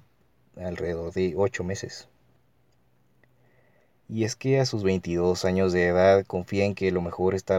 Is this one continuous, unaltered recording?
yes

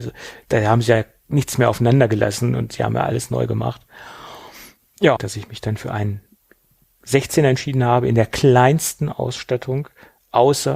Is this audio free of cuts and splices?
no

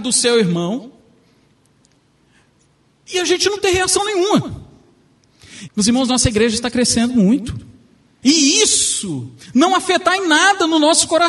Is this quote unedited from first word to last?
no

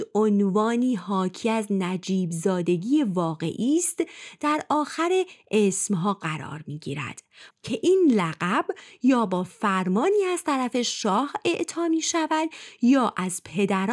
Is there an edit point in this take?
yes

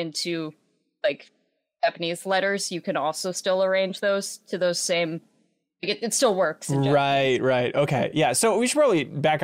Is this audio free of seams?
yes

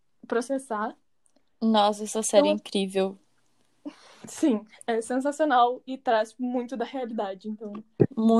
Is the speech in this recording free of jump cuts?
yes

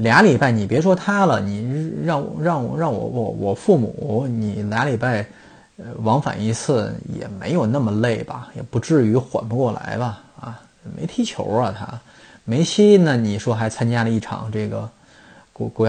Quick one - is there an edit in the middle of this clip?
no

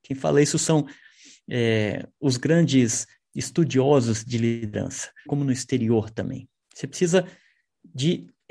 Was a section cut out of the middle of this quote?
yes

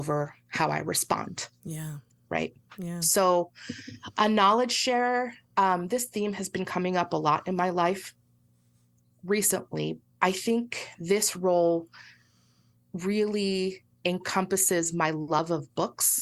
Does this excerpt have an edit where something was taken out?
yes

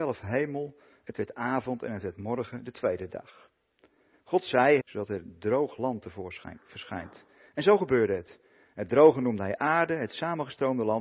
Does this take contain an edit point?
yes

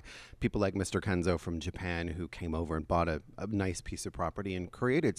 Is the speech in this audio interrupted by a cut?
no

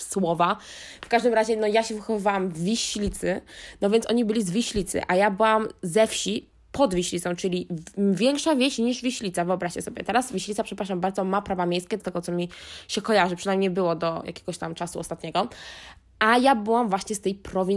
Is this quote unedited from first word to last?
no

